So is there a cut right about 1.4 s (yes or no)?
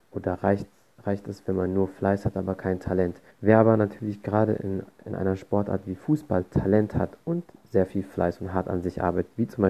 no